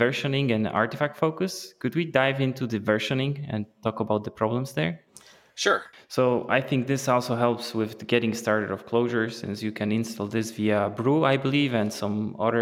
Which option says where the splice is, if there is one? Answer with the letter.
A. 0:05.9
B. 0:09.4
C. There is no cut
A